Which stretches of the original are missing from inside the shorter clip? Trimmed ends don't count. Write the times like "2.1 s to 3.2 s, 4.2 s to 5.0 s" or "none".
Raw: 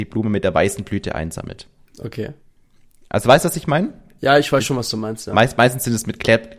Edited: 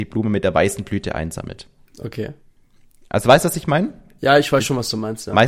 none